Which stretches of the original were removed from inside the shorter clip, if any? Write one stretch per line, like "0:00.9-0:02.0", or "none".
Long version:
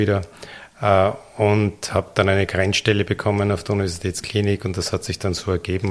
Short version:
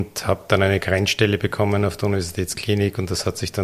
none